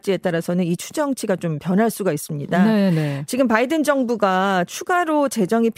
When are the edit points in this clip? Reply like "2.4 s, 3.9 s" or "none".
none